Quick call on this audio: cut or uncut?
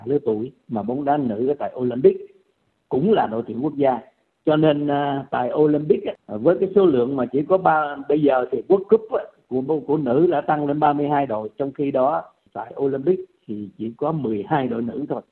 uncut